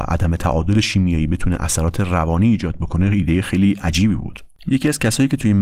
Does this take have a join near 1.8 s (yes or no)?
no